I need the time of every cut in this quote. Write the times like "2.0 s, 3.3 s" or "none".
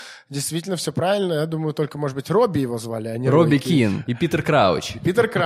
4.1 s